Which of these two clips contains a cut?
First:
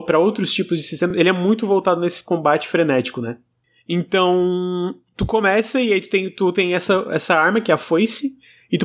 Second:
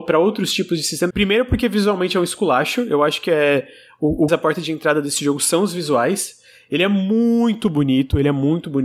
second; 2 cuts; at 1.1 s, 4.3 s

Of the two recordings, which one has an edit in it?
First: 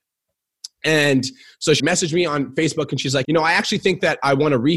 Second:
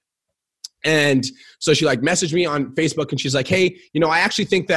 first; 2 cuts; at 1.8 s, 3.2 s

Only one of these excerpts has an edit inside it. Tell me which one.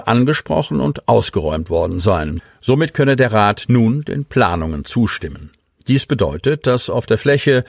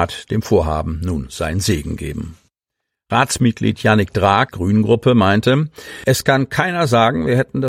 second; 1 cut; at 4.5 s

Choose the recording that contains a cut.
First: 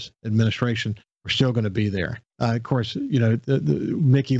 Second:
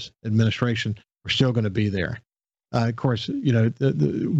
first; 1 cut; at 2.3 s

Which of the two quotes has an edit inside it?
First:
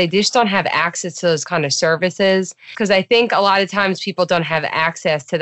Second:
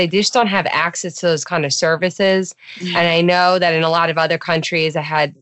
first; 1 cut; at 2.7 s

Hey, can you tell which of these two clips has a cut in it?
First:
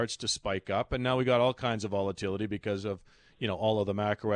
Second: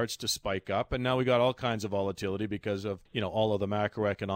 second; 1 cut; at 3.1 s

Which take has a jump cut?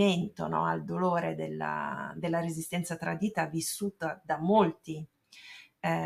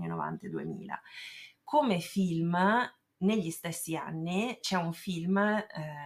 second; 1 cut; at 4.6 s

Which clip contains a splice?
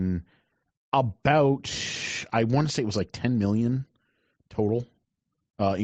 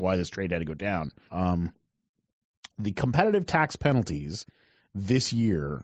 second; 1 cut; at 1.3 s

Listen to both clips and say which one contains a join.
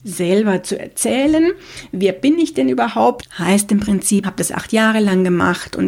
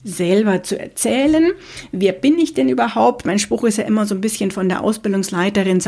first; 2 cuts; at 3.2 s, 4.2 s

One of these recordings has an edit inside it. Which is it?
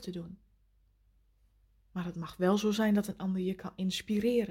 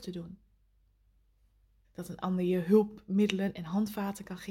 second; 1 cut; at 1.8 s

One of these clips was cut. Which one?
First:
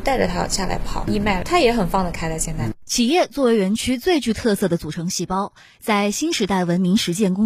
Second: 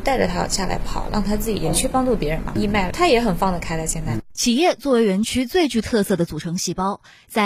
first; 1 cut; at 1.0 s

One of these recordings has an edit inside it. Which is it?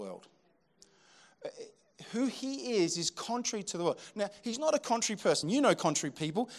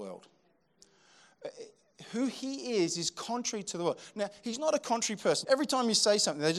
second; 1 cut; at 5.4 s

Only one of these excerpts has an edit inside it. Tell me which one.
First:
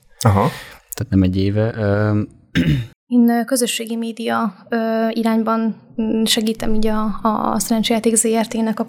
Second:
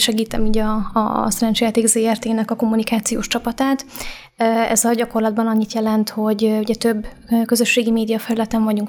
first; 1 cut; at 2.9 s

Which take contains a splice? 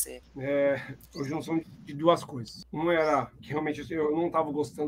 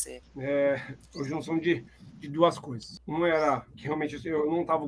first; 1 cut; at 1.6 s

